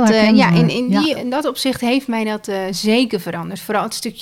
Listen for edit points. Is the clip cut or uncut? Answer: cut